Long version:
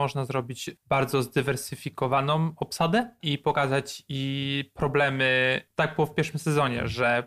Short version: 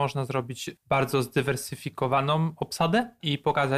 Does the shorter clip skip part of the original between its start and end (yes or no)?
no